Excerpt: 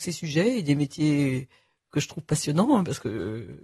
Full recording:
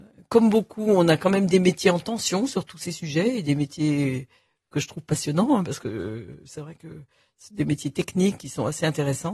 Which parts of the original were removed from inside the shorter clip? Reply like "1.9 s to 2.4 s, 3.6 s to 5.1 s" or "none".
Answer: none